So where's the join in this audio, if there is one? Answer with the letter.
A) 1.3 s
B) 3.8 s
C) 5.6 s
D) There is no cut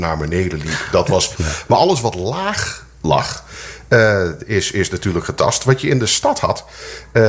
A